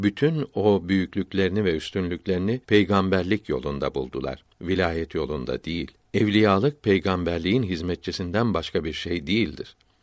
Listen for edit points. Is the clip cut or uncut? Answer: cut